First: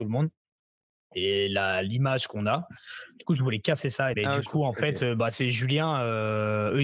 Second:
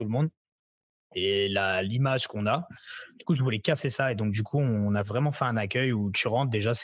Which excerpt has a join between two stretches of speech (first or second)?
first